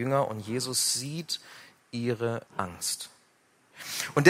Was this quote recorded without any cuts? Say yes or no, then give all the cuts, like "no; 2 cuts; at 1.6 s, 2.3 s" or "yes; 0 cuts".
no; 1 cut; at 2.5 s